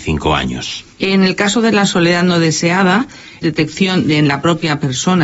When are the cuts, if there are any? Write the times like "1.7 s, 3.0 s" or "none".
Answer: 0.9 s, 3.4 s